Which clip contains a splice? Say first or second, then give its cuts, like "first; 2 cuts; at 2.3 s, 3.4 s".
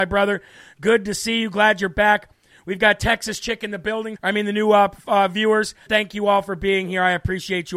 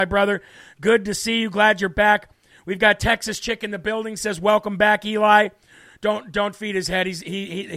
first; 2 cuts; at 4.2 s, 5.9 s